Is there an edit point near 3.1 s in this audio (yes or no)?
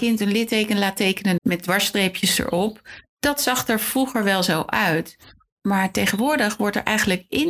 no